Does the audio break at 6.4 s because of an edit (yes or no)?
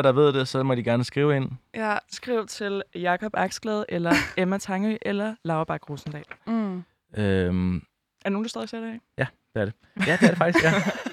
yes